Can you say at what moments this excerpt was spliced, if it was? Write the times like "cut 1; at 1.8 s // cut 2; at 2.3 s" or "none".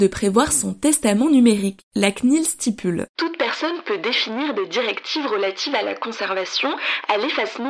none